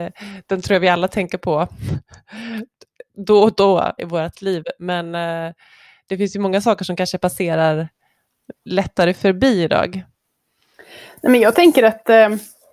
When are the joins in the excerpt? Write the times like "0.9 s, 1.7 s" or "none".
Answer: 4.0 s, 8.6 s